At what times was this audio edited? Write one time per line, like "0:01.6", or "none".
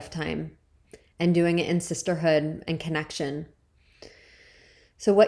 none

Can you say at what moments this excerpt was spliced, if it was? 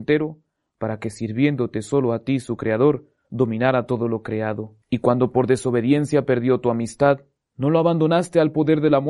0:04.8

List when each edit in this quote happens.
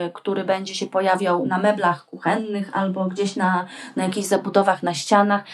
none

